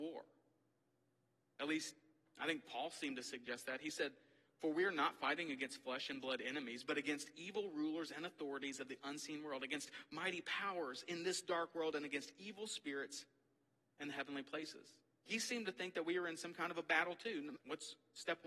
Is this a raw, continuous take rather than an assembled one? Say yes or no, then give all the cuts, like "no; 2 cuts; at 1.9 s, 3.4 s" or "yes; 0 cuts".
no; 2 cuts; at 15.3 s, 17.6 s